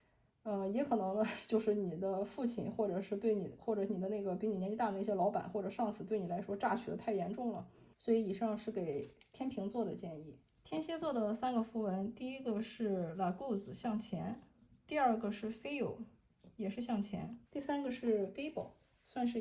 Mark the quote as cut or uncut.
cut